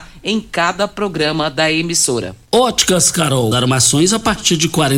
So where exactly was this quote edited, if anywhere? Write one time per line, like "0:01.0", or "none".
0:02.4
0:03.5